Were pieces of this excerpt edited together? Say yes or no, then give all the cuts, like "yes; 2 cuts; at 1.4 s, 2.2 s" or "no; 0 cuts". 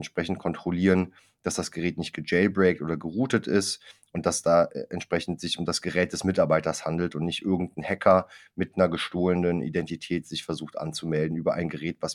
no; 0 cuts